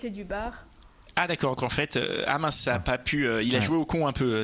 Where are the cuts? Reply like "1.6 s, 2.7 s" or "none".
1.6 s